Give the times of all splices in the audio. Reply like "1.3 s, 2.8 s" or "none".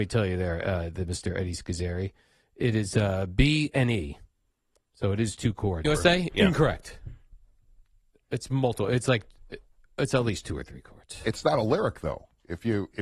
5.8 s